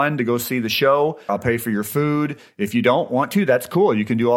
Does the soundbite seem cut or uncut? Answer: cut